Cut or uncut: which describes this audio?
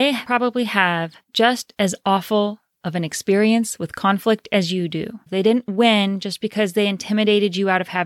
cut